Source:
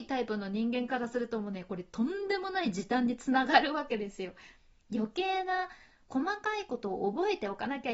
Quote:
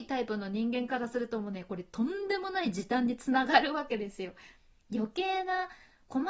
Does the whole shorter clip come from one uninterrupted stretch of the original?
yes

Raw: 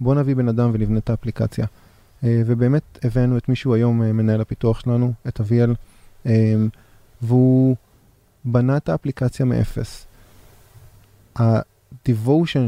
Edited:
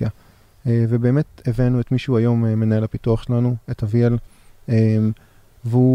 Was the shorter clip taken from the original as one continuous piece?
yes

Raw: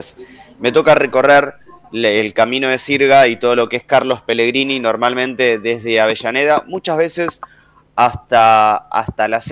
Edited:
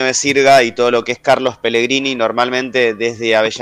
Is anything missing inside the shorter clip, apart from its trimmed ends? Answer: no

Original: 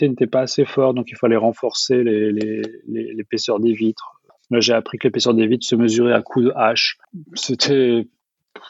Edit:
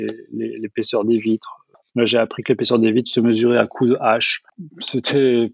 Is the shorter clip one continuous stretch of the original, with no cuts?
yes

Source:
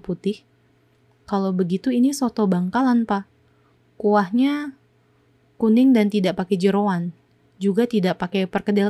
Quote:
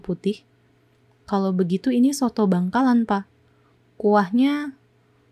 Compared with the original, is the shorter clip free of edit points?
yes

